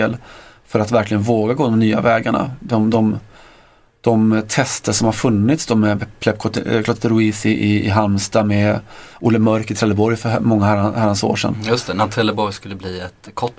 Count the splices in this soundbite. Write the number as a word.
zero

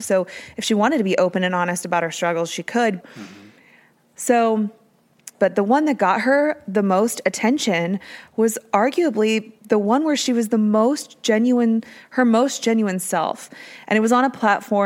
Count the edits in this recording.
three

